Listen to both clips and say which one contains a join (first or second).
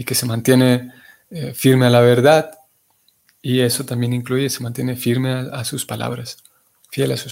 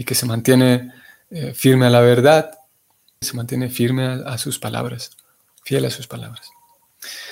second